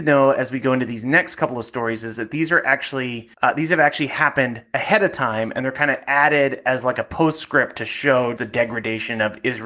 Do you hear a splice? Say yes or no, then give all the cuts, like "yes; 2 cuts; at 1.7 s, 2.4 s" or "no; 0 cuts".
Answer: yes; 2 cuts; at 3.3 s, 8.4 s